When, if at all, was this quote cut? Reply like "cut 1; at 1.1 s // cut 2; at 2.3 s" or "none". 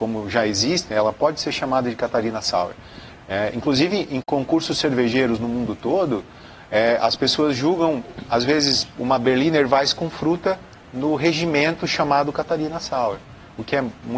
cut 1; at 3.2 s